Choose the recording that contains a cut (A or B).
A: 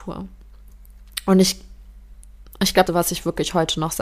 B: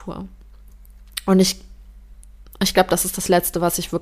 A